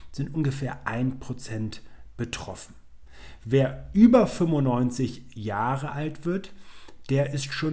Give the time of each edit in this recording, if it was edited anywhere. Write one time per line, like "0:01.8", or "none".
none